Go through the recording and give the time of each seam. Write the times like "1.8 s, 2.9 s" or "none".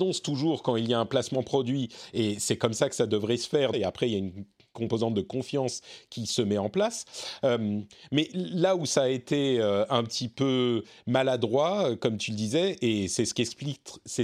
3.7 s